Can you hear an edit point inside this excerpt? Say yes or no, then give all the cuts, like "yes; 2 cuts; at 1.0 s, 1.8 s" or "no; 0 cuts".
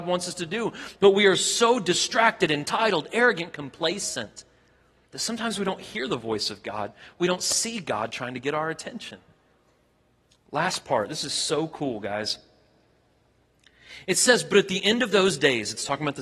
no; 0 cuts